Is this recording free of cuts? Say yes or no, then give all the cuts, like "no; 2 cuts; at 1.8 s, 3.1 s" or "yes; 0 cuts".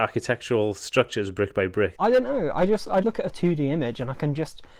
no; 2 cuts; at 1.9 s, 3.0 s